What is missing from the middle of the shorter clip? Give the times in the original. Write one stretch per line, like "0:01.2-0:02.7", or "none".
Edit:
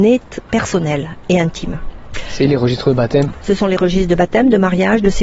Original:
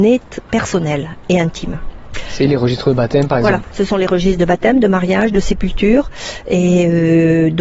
0:03.3-0:03.6